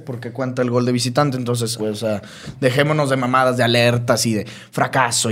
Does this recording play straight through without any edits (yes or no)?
no